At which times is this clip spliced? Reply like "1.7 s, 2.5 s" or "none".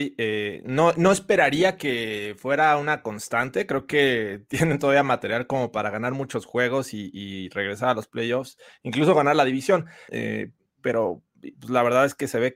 10.1 s